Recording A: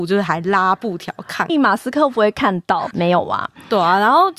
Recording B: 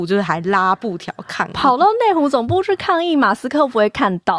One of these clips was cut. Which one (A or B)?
A